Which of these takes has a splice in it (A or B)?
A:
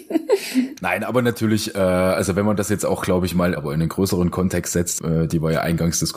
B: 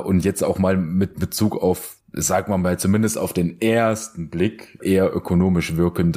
A